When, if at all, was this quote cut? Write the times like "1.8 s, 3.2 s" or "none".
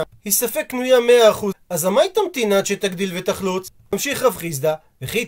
1.5 s, 3.9 s